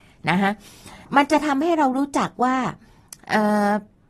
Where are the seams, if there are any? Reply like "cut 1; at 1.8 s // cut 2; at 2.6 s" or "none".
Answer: cut 1; at 1.0 s